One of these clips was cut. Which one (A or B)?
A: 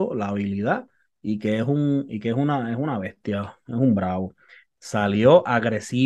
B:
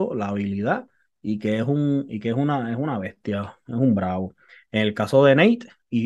A